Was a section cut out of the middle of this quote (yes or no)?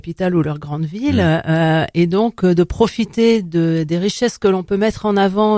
no